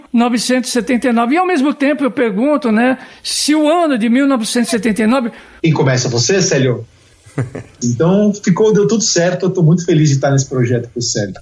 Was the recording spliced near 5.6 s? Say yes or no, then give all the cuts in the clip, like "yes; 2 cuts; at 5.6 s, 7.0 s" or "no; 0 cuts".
yes; 2 cuts; at 5.6 s, 7.8 s